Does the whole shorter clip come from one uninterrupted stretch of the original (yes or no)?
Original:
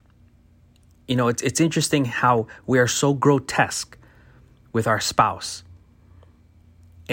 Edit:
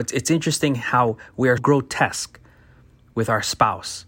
no